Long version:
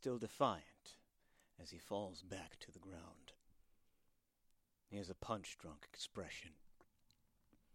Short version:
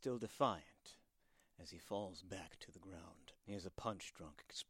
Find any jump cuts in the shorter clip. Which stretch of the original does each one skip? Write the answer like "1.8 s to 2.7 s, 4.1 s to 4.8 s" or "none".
3.4 s to 4.8 s